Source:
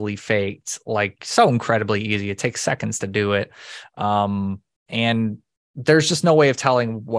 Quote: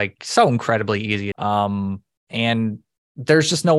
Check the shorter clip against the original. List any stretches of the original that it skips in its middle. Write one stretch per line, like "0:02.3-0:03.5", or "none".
0:02.3-0:03.9